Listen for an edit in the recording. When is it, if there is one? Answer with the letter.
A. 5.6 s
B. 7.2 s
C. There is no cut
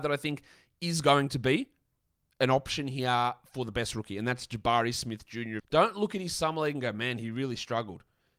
A